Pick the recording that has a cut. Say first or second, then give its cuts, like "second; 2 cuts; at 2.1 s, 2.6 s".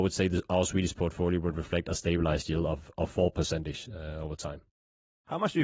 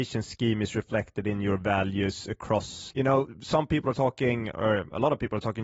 second; 1 cut; at 2.9 s